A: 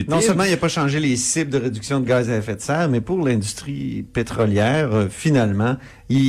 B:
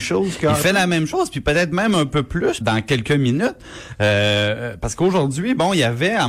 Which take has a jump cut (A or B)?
B